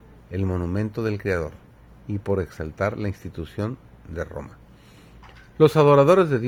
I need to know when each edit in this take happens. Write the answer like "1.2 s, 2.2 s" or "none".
5.5 s